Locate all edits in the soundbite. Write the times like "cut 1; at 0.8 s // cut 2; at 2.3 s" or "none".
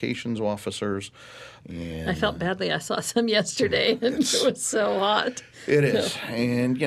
cut 1; at 1.6 s